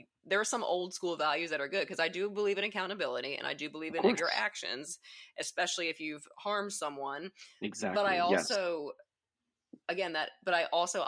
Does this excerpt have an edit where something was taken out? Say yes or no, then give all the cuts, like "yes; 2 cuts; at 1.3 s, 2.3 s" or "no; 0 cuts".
yes; 1 cut; at 4.2 s